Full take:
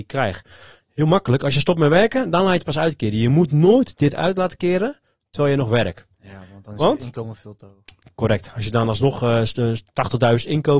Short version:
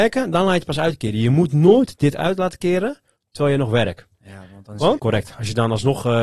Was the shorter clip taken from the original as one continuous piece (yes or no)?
no